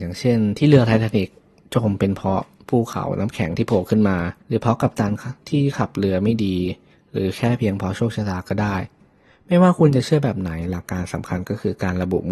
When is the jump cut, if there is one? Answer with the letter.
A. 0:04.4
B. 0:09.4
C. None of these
A